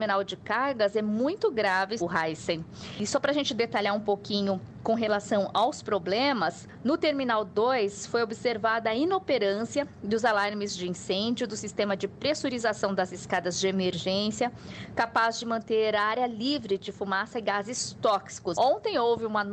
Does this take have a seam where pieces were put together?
yes; 2 cuts; at 2.0 s, 18.5 s

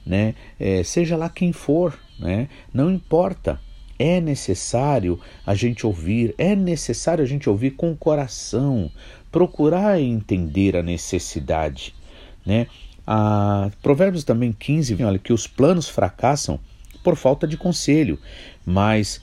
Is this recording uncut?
no; 2 cuts; at 13.0 s, 15.0 s

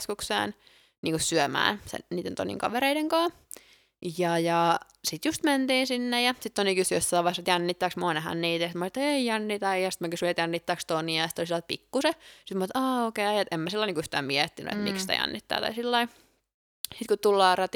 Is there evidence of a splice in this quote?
no; 0 cuts

